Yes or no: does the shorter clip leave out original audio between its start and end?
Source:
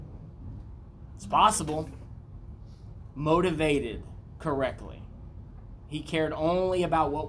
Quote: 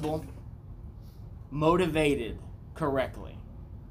no